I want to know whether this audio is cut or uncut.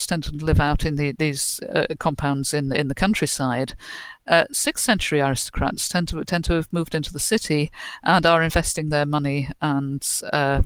uncut